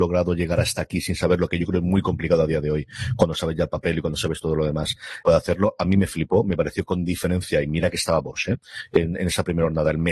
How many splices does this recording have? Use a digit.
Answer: 1